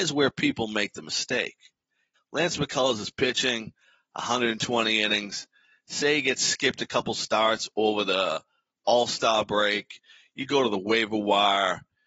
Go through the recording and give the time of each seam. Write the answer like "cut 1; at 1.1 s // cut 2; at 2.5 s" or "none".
cut 1; at 2.1 s